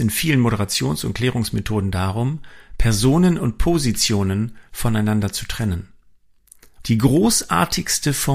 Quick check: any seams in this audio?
yes; 1 cut; at 6.8 s

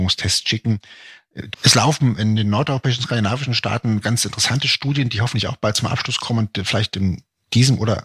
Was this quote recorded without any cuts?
no; 1 cut; at 1.5 s

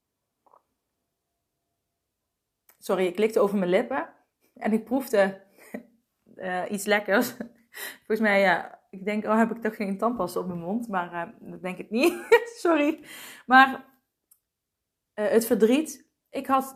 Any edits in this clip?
no; 0 cuts

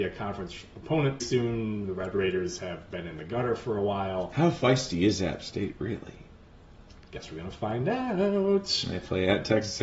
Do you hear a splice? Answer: yes; 1 cut; at 1.2 s

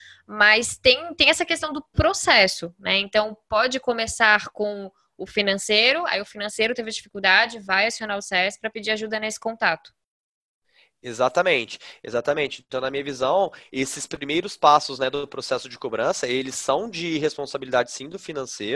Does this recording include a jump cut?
no; 0 cuts

